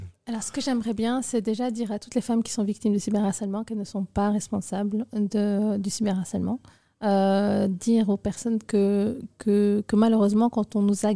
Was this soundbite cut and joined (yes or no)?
no